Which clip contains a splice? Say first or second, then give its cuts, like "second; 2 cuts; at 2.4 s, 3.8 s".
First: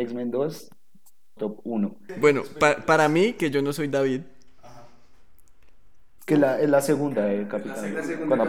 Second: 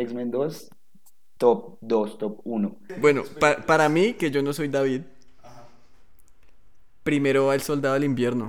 first; 2 cuts; at 1.4 s, 6.2 s